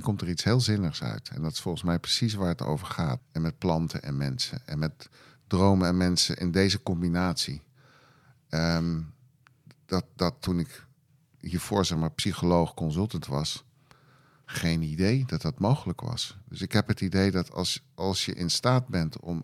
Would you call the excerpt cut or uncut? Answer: cut